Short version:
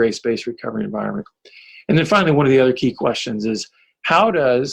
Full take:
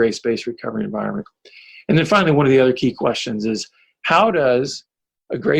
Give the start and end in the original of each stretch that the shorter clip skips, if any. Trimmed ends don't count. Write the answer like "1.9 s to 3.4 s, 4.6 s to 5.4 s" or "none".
none